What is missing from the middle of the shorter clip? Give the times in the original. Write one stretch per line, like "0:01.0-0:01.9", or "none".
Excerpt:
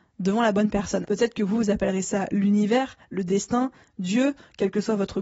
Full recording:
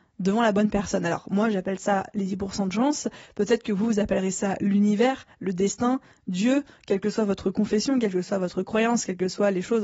0:01.0-0:03.3

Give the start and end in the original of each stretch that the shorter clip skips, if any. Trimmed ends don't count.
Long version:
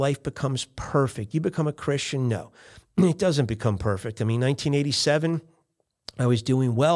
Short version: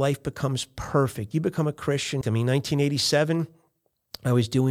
0:02.2-0:04.2

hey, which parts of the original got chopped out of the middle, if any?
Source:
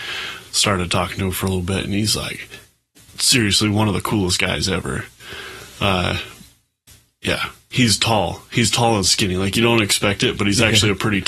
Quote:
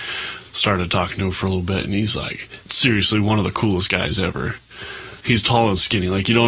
0:02.6-0:03.1
0:05.7-0:08.5

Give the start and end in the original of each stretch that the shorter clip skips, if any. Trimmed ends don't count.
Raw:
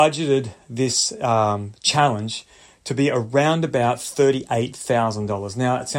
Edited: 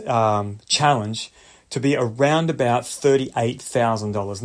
none

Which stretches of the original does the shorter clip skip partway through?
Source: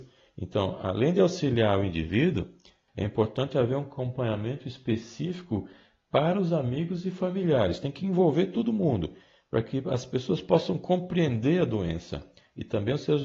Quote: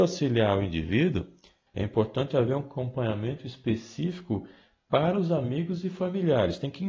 none

